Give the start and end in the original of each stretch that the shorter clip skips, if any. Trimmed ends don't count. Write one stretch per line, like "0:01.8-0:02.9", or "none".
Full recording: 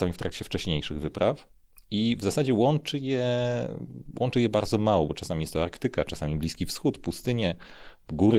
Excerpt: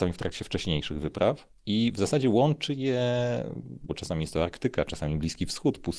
0:01.6-0:01.8
0:04.1-0:05.1

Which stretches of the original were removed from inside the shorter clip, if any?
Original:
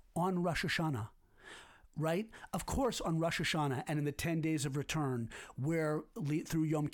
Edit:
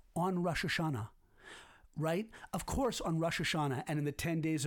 none

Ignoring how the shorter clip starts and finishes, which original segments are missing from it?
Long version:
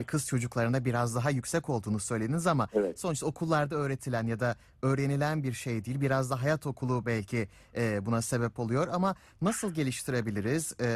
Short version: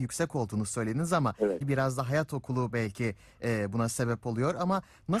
0:02.9-0:05.9

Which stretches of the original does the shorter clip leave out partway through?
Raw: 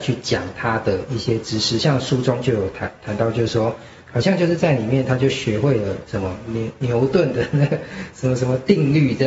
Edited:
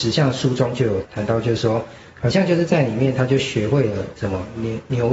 0:02.7-0:03.0

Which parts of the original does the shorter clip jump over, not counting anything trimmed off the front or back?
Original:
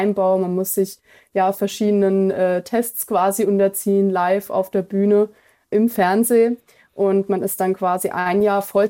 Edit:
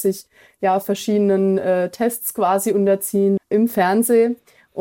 0:04.1-0:05.6

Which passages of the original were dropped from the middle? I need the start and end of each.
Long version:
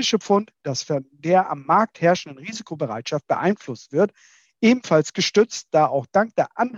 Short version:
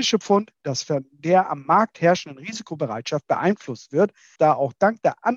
0:04.4-0:05.7

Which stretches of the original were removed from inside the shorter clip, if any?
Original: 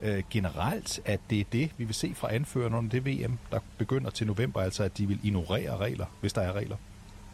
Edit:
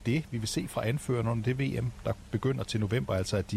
none

